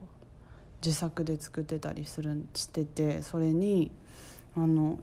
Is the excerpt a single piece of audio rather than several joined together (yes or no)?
no